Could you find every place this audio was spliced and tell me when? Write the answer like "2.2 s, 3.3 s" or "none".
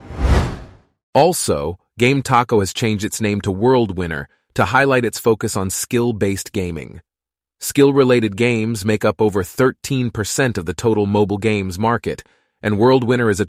none